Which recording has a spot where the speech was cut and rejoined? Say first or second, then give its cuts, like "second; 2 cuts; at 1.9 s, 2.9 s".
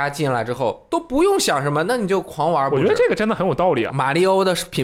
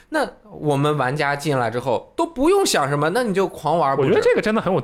first; 1 cut; at 3.9 s